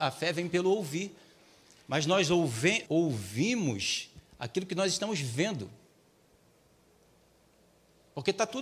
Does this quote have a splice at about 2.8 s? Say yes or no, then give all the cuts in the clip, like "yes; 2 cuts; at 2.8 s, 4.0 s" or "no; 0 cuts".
yes; 1 cut; at 2.8 s